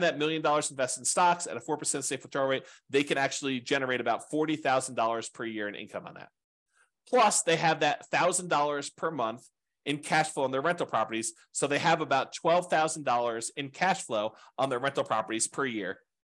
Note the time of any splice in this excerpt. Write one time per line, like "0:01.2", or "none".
none